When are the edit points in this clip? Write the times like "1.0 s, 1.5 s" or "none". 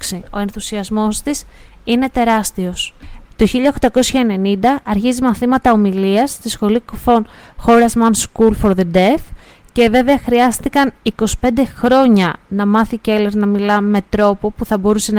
3.3 s